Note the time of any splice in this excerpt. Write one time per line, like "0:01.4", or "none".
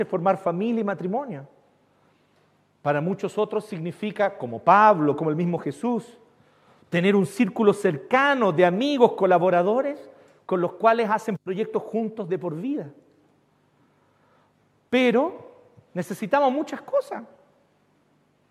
none